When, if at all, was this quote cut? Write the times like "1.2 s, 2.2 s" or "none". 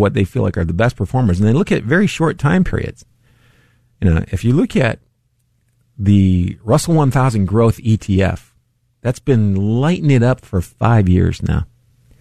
none